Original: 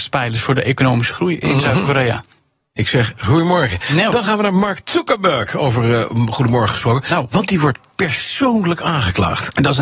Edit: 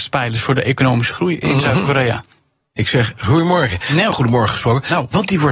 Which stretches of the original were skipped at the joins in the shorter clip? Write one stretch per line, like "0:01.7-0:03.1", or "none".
0:04.1-0:06.3